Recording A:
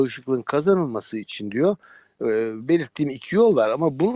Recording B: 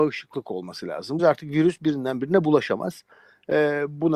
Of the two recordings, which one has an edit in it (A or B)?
B